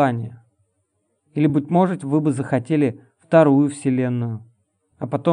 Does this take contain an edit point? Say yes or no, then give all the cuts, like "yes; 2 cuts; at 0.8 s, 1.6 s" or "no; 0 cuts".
no; 0 cuts